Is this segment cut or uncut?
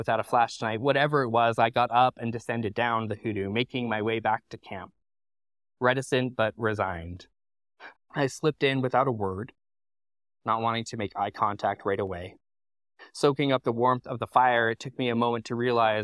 cut